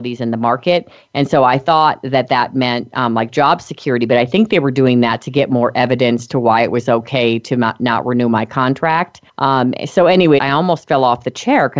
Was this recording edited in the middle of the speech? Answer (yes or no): yes